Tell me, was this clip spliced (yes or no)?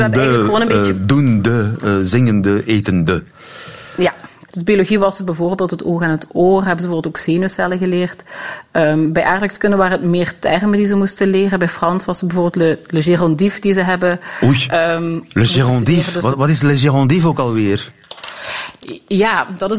yes